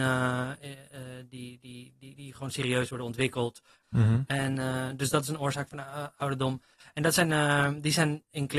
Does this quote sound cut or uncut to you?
cut